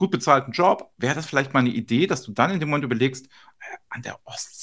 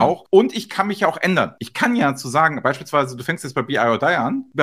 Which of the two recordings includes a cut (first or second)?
second